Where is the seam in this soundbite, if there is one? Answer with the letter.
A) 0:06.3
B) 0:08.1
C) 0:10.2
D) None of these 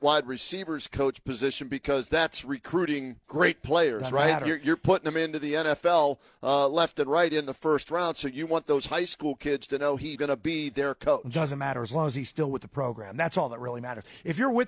C